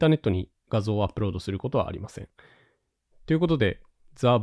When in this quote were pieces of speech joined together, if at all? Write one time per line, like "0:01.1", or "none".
0:03.1